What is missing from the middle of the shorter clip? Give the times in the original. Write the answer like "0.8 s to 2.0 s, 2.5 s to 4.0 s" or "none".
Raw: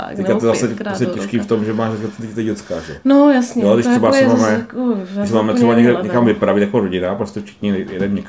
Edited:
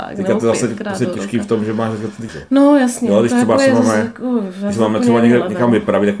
2.3 s to 2.8 s